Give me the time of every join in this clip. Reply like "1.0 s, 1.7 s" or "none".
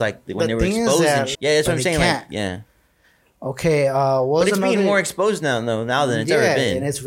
1.3 s